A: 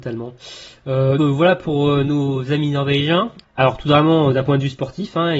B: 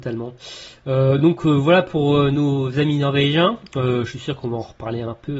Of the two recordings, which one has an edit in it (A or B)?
A